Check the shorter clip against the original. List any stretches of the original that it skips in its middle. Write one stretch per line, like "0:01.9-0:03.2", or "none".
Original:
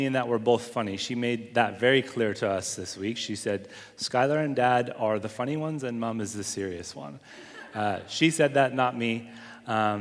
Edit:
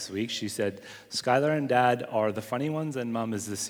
none